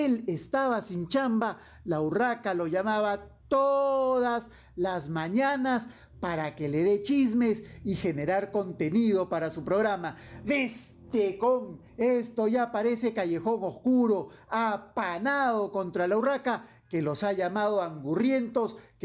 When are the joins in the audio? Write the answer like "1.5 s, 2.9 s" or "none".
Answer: 11.9 s